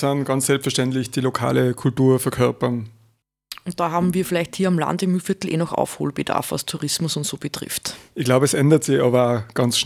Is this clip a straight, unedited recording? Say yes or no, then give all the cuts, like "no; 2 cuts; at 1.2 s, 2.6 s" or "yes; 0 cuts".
yes; 0 cuts